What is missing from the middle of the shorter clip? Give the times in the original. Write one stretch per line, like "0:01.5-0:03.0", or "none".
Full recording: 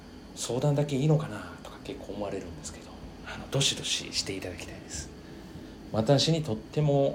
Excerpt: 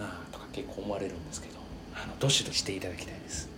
0:03.8-0:04.1